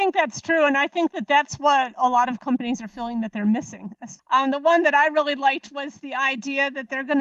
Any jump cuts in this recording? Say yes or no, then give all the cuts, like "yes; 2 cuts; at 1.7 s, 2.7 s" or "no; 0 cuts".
yes; 1 cut; at 4.2 s